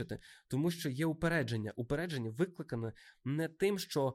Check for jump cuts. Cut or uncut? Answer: uncut